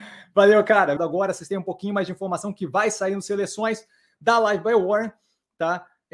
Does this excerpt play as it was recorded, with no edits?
no; 1 cut; at 1.0 s

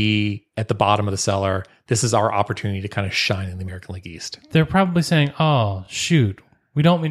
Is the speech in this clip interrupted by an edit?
no; 0 cuts

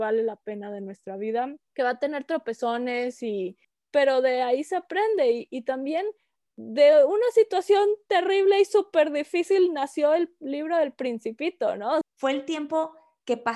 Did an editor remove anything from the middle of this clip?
yes; 2 cuts; at 5.5 s, 12.0 s

